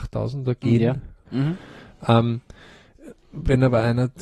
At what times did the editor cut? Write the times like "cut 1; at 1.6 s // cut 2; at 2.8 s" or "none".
cut 1; at 1.2 s